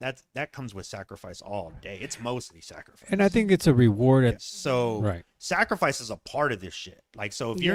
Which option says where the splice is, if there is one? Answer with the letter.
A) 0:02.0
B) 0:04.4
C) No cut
B